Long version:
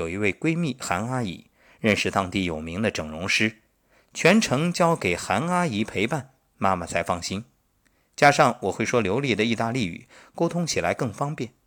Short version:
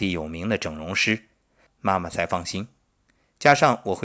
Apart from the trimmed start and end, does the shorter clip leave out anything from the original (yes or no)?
yes